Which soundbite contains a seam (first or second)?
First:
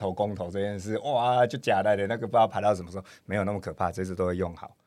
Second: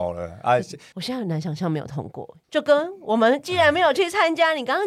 second